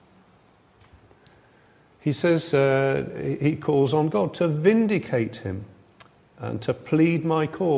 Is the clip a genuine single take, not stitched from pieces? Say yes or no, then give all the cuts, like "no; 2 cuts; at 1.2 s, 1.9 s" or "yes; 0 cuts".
yes; 0 cuts